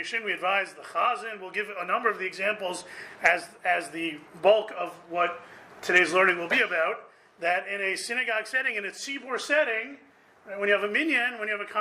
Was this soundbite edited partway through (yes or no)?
no